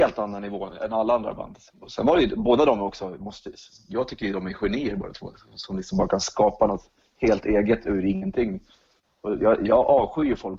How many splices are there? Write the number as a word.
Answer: one